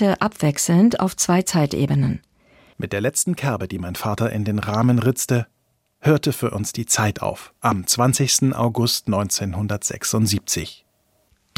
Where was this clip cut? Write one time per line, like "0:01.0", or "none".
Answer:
0:02.7